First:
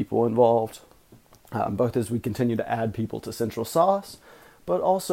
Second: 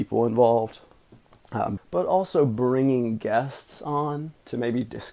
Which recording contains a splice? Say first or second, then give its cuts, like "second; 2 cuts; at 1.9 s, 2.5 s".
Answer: second; 1 cut; at 1.8 s